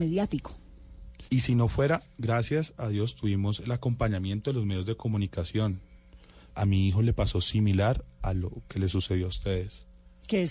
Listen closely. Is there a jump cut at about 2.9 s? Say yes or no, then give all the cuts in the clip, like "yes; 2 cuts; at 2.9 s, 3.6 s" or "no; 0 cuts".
no; 2 cuts; at 1.3 s, 6.5 s